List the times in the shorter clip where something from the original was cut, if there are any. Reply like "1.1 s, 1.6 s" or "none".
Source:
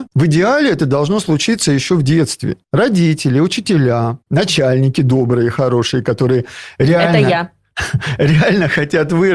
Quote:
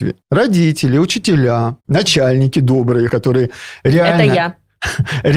3.1 s